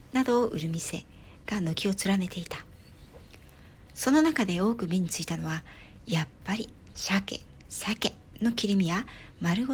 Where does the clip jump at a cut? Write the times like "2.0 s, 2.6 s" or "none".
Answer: 6.9 s

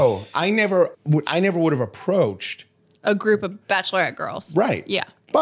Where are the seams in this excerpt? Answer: 0.9 s

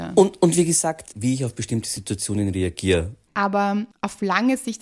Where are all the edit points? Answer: 1.1 s, 3.3 s

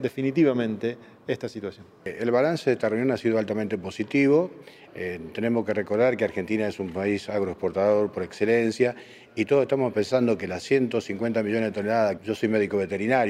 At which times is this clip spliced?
4.9 s, 12.2 s

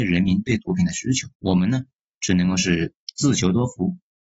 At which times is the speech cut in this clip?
1.3 s

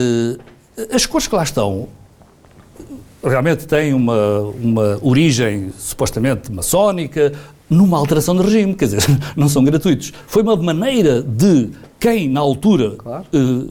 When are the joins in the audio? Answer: none

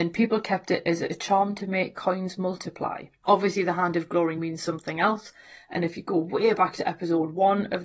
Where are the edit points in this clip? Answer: 4.4 s

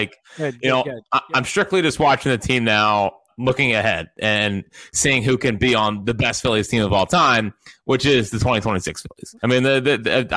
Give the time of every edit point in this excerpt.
3.3 s, 9.4 s

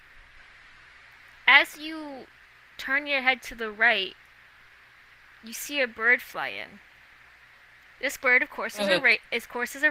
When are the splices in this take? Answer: none

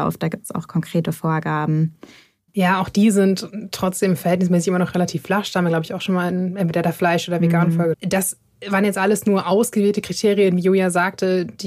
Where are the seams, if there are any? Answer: 2.5 s, 7.9 s

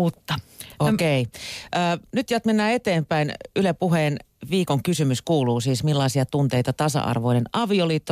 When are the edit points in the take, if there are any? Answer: none

